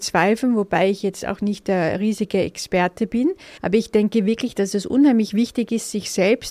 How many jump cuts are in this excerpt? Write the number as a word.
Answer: one